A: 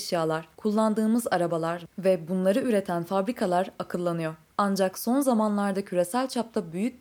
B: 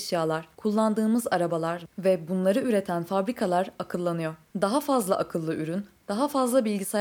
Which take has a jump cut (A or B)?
A